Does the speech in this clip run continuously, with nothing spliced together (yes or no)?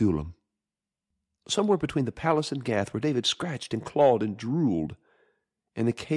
yes